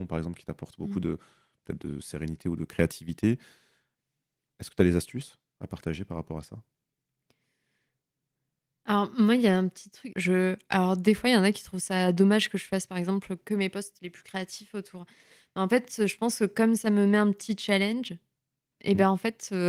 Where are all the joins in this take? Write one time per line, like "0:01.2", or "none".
0:10.1